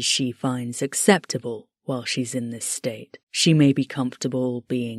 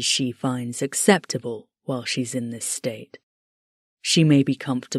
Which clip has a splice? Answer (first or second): first